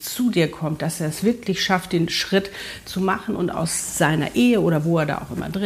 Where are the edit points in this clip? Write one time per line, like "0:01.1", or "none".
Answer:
none